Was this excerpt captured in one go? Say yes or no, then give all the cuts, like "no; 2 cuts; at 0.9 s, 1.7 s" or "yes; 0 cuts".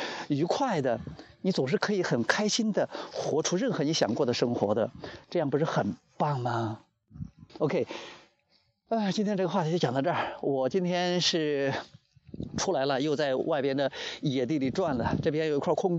no; 1 cut; at 7.5 s